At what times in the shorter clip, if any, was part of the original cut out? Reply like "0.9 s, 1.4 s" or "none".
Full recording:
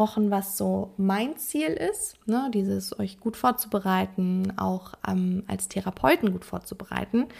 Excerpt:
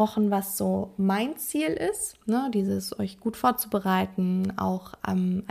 none

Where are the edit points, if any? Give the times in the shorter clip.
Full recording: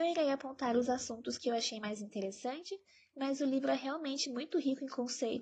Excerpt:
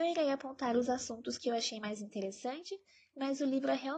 none

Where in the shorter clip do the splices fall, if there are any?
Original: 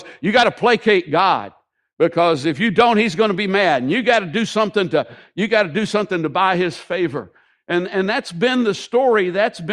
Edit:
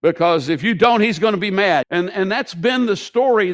1.8 s

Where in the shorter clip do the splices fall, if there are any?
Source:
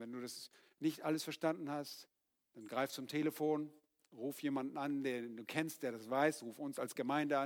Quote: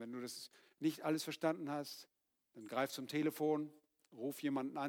none

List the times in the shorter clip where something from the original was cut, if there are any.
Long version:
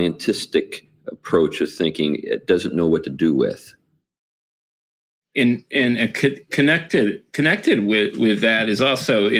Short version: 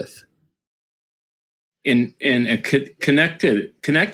none

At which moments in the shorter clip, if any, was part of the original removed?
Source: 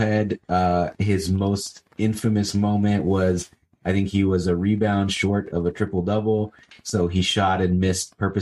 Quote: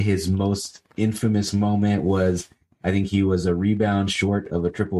none

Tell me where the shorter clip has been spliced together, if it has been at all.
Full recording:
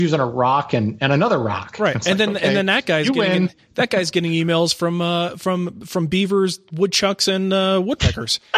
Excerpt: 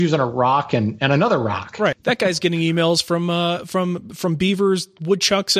1.9 s

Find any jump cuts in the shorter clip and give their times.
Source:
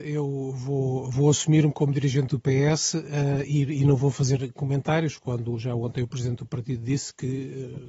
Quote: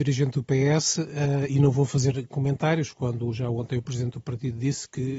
1.5 s

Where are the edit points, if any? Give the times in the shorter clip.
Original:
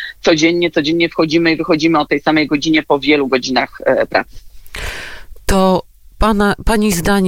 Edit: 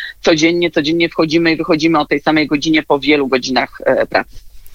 none

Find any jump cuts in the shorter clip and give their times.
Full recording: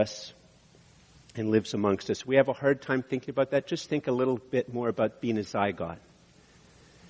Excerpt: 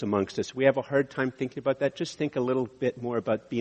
none

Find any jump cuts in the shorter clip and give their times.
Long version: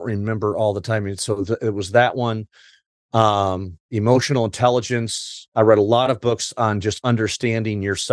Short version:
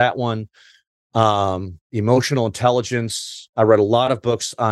none

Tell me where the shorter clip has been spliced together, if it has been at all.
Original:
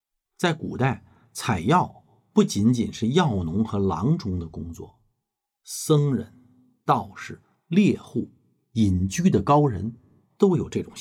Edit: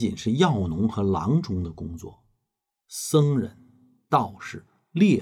none

